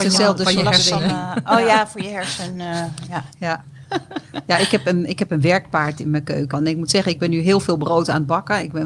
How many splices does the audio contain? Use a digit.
1